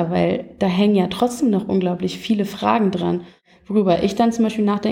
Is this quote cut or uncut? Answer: uncut